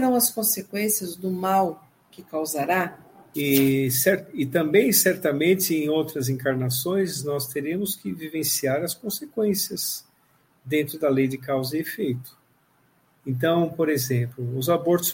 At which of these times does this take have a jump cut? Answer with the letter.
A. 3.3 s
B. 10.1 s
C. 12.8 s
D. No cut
A